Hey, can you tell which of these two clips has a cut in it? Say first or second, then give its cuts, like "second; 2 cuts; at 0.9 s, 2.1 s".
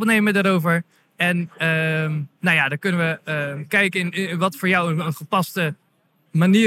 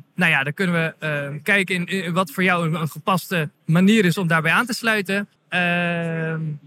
second; 2 cuts; at 3.6 s, 5.4 s